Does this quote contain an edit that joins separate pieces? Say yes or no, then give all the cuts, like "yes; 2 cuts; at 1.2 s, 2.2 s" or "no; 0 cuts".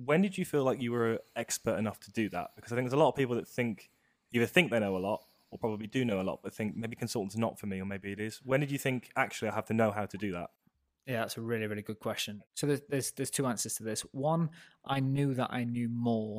no; 0 cuts